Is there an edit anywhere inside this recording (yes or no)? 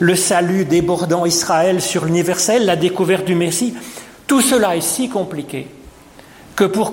no